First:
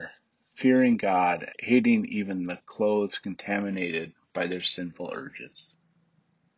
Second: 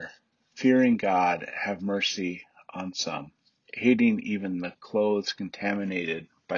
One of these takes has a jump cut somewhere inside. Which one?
first; 1 cut; at 1.5 s

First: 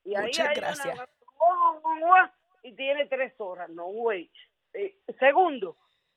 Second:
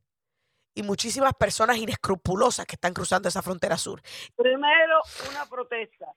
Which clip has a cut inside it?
second; 1 cut; at 4.3 s

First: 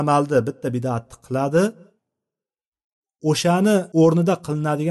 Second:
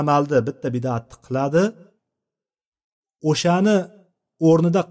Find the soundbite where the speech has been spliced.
first; 1 cut; at 3.9 s

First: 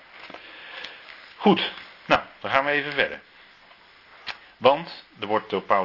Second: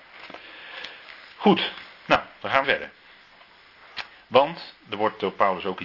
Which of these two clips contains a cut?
second; 1 cut; at 2.6 s

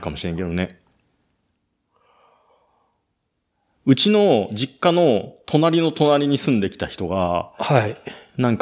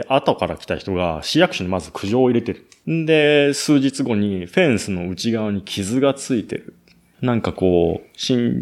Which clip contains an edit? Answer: second; 2 cuts; at 2.8 s, 7.1 s

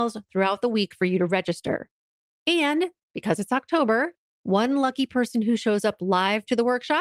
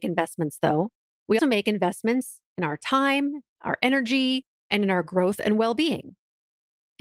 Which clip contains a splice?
second; 1 cut; at 1.4 s

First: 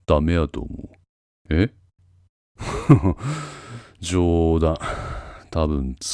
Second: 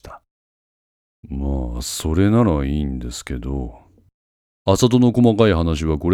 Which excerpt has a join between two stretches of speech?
second; 1 cut; at 1.2 s

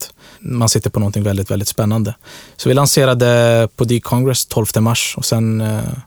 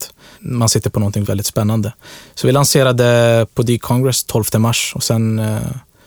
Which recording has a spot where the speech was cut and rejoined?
second; 1 cut; at 1.2 s

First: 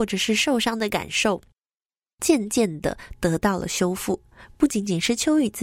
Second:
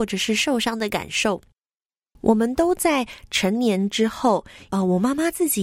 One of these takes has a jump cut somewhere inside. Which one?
second; 2 cuts; at 2.2 s, 4.7 s

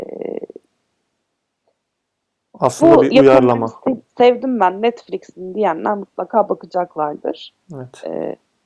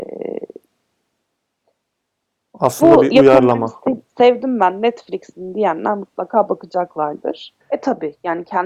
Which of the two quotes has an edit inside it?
second; 1 cut; at 7.6 s

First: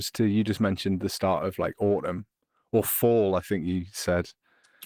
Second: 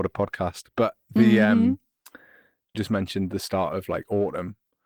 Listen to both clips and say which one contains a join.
second; 1 cut; at 2.7 s

